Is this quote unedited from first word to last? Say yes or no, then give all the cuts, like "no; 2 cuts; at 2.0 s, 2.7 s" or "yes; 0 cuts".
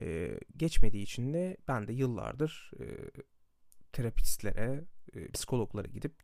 no; 1 cut; at 5.3 s